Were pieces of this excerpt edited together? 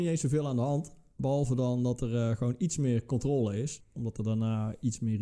yes; 1 cut; at 3.8 s

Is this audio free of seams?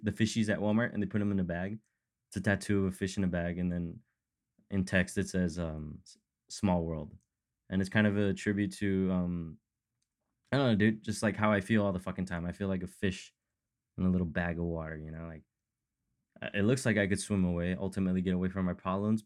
yes; 0 cuts

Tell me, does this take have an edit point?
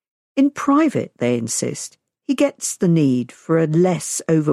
no; 0 cuts

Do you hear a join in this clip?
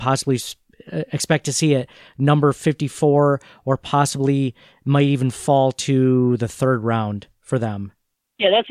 no; 0 cuts

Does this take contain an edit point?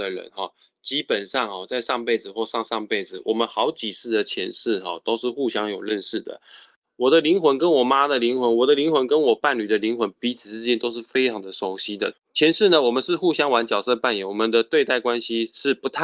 yes; 1 cut; at 12.1 s

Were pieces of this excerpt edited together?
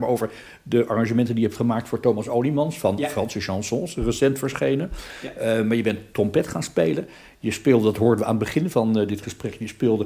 no; 0 cuts

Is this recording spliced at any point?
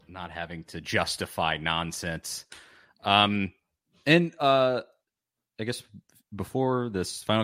no; 0 cuts

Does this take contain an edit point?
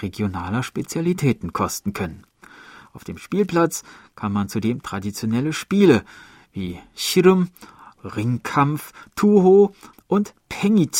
yes; 2 cuts; at 7.9 s, 9.9 s

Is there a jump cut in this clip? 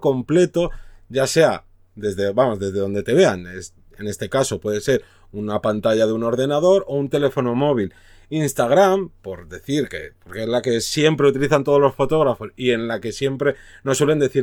no; 0 cuts

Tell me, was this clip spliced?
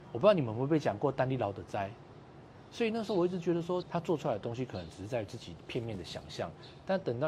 yes; 1 cut; at 3.8 s

